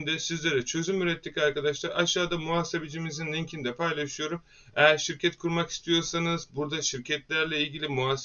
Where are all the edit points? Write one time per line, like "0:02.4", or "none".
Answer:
none